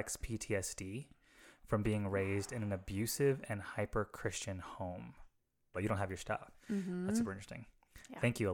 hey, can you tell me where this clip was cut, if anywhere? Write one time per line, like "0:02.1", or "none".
0:05.7